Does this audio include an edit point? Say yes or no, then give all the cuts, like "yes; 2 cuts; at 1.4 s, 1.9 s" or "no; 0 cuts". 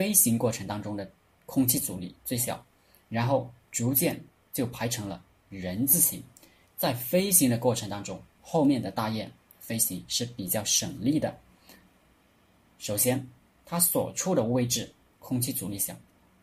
no; 0 cuts